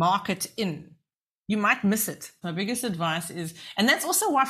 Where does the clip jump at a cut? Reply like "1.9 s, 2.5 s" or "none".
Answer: 2.4 s